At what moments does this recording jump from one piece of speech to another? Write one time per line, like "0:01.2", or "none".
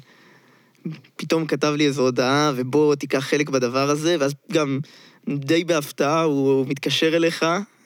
none

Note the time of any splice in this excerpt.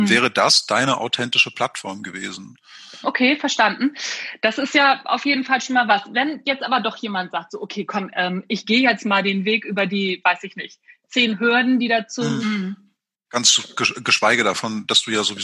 0:03.0
0:12.4

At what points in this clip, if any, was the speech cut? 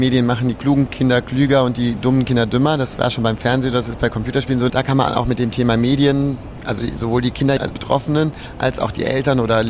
0:04.7
0:07.6

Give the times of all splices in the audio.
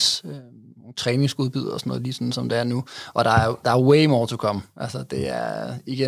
none

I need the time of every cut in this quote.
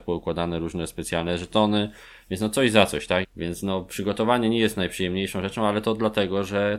0:03.2

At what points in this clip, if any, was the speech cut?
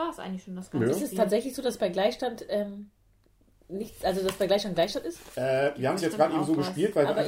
none

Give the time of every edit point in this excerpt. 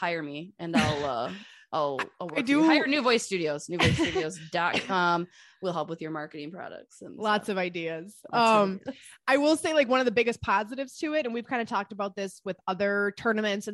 none

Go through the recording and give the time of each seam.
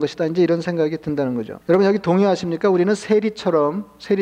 0:01.6

